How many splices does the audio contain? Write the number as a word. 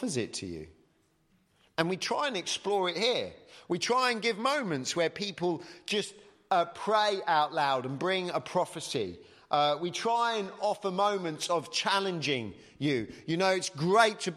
zero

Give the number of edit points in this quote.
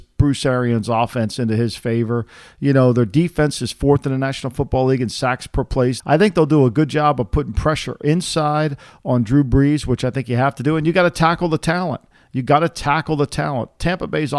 one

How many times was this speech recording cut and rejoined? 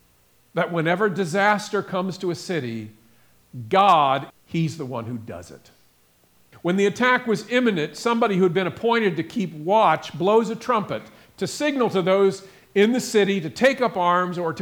two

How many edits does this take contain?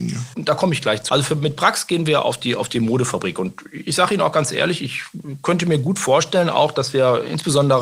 one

